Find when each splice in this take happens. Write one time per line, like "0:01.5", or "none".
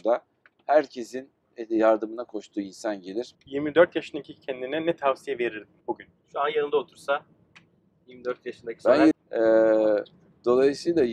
0:03.3
0:05.8
0:09.1